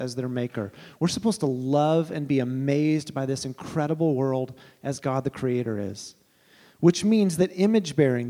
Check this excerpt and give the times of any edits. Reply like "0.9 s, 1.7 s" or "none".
none